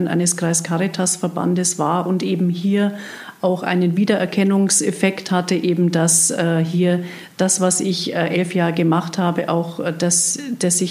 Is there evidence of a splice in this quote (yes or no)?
no